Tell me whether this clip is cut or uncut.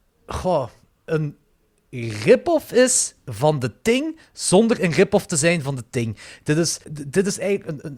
cut